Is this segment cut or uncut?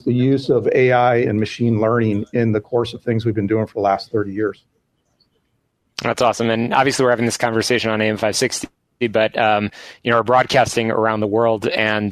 uncut